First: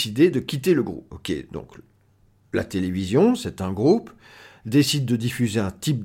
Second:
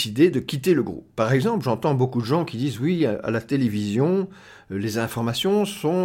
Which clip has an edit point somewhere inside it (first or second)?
first